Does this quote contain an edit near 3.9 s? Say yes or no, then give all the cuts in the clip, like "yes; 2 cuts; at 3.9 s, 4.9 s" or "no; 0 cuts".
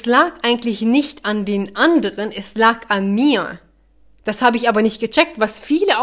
no; 0 cuts